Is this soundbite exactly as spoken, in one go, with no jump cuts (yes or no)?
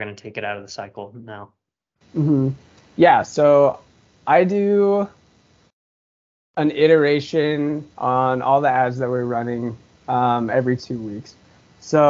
yes